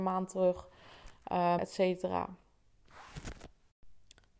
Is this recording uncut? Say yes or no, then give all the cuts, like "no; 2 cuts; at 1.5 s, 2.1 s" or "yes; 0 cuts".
no; 1 cut; at 1.6 s